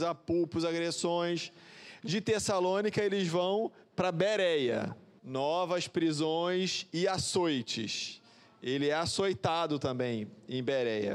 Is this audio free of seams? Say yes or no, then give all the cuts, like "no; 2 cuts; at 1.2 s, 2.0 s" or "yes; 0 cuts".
no; 1 cut; at 5.2 s